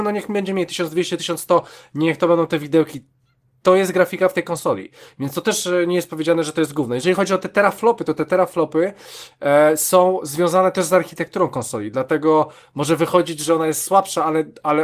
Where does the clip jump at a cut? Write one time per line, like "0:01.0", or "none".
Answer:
none